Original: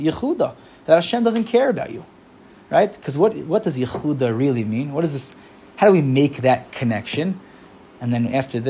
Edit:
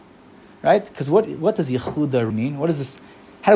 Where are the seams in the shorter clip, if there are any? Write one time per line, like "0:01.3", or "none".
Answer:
0:02.3